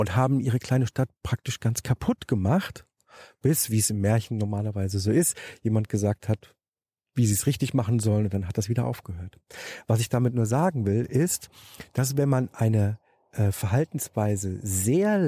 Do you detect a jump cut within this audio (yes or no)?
no